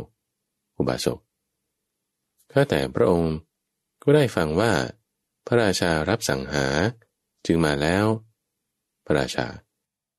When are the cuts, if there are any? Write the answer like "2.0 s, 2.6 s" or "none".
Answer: none